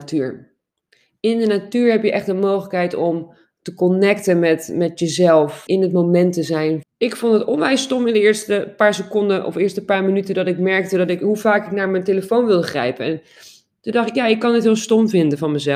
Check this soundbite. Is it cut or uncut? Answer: cut